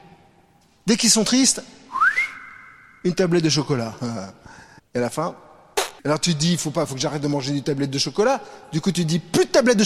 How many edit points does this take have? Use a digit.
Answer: 2